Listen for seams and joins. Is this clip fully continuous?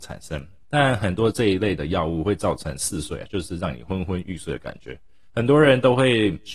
no; 1 cut; at 5.3 s

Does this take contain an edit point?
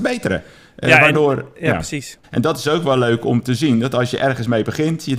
yes; 1 cut; at 2.2 s

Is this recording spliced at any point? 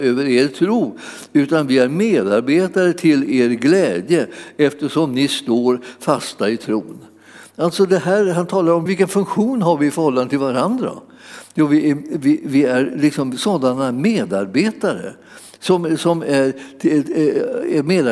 yes; 1 cut; at 8.9 s

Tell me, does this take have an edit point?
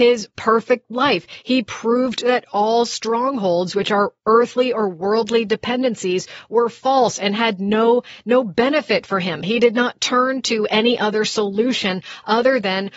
no; 0 cuts

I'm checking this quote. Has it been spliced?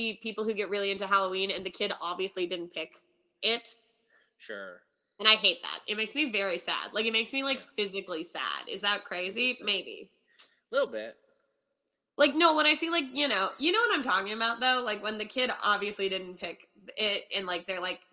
no; 0 cuts

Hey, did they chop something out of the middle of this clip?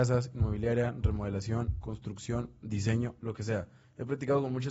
no; 0 cuts

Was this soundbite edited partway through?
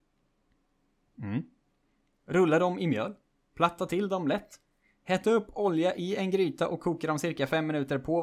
no; 0 cuts

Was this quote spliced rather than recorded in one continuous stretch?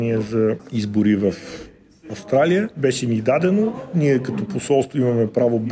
no; 0 cuts

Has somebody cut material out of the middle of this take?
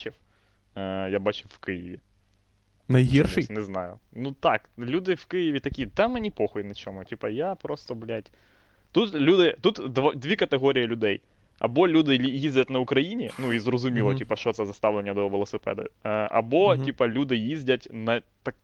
no; 0 cuts

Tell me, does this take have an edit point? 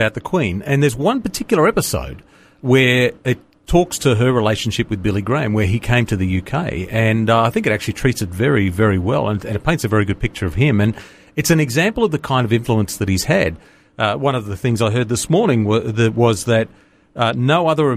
no; 0 cuts

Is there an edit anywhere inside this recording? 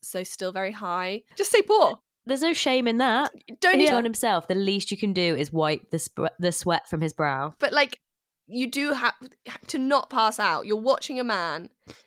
yes; 3 cuts; at 1.3 s, 3.9 s, 7.6 s

